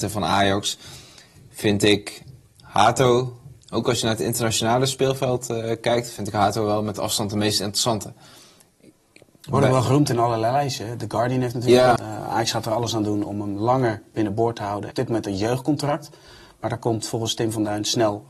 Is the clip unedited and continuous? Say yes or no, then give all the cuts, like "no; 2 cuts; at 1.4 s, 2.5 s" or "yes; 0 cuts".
no; 2 cuts; at 12.0 s, 14.9 s